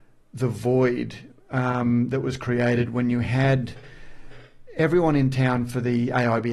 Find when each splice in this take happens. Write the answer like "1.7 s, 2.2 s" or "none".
none